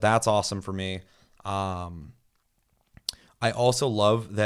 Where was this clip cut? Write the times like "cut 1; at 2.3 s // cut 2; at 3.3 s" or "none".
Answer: none